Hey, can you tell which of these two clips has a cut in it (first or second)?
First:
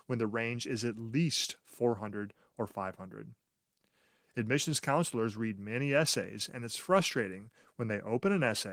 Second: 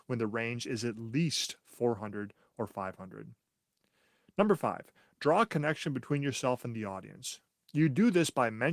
first